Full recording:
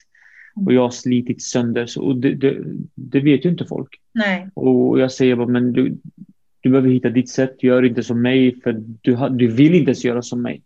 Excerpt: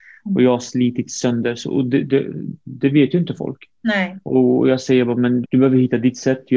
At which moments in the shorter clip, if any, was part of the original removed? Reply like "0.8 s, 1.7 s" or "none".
5.4 s